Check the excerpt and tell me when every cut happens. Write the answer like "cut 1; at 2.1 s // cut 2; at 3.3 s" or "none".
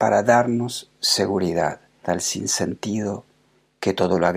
cut 1; at 2.0 s